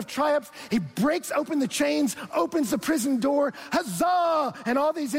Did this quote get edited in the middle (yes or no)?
no